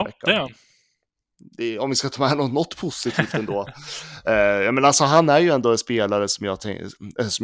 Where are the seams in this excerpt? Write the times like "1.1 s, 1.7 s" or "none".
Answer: none